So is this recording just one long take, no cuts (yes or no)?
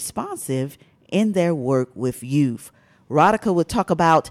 yes